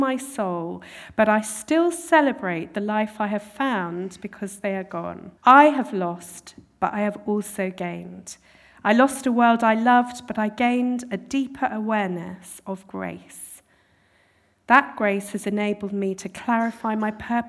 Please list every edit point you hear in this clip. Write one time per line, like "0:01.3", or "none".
0:05.4

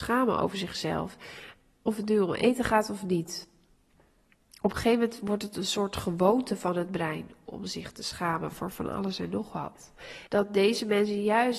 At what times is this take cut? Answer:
0:10.3

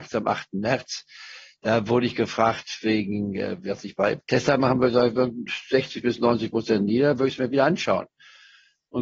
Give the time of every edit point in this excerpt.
none

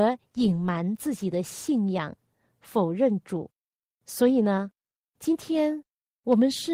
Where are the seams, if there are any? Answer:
none

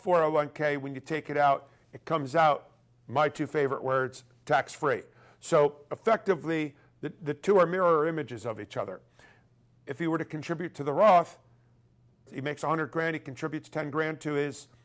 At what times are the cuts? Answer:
0:09.8
0:12.3

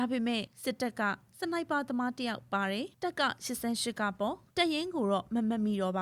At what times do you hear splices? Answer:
0:02.9

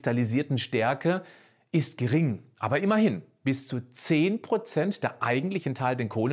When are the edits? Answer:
none

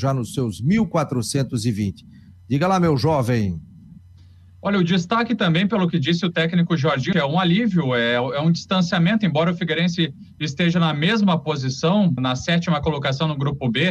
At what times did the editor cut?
0:07.1
0:12.2

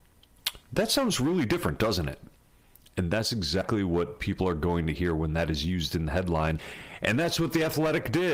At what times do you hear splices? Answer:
none

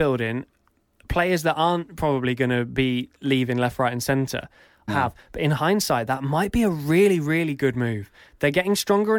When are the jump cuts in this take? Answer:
0:04.9

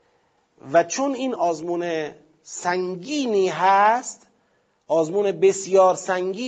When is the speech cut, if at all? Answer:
0:01.4

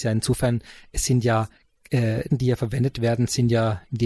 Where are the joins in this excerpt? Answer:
0:02.3

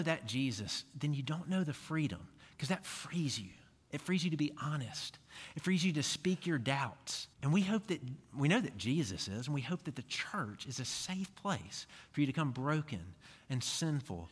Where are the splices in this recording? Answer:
0:03.8
0:07.3

